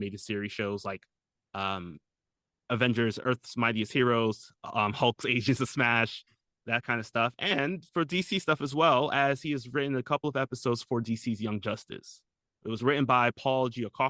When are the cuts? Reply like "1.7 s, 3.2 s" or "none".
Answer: 3.2 s, 12.5 s